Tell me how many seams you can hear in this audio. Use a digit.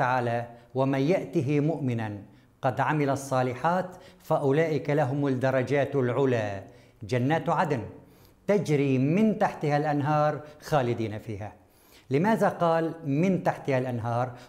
0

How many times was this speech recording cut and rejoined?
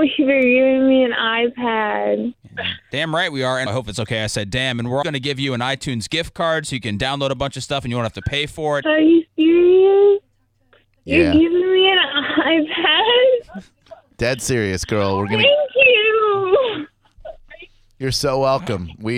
3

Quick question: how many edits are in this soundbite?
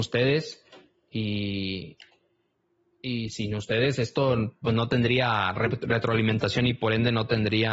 0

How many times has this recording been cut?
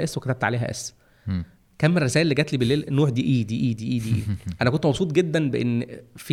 0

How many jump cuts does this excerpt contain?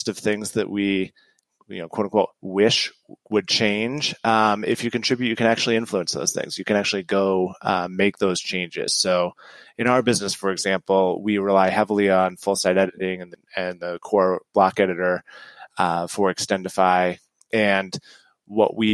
0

